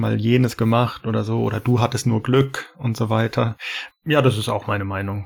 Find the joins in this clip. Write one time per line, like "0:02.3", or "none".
0:03.9